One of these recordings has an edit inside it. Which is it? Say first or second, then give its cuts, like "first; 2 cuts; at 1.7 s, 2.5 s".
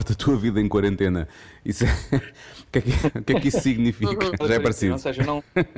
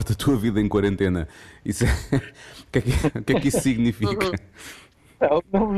first; 1 cut; at 4.4 s